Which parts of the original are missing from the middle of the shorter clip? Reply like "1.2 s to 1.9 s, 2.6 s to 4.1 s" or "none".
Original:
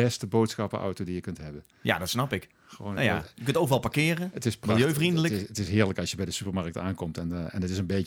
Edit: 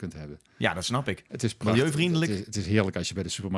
2.5 s to 4.3 s